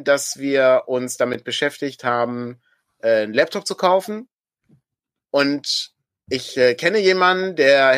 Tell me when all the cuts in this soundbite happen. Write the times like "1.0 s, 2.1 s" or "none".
none